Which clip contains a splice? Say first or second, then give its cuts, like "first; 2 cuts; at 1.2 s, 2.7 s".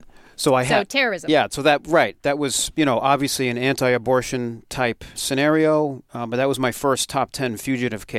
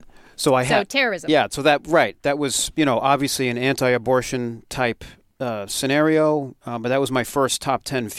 first; 1 cut; at 5.1 s